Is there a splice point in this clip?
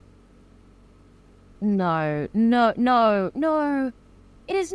no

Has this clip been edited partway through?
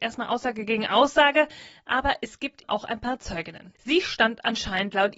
yes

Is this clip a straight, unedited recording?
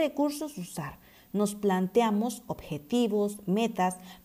yes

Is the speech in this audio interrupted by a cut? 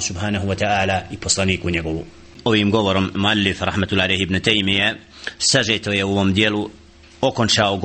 no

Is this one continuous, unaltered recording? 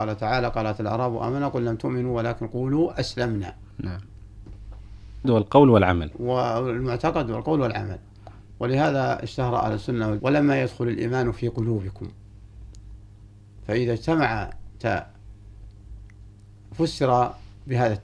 no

